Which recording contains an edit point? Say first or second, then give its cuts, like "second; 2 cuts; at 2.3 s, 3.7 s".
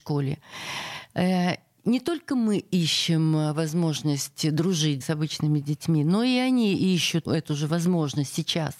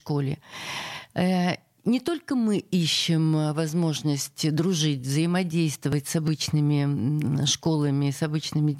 first; 2 cuts; at 5.0 s, 7.3 s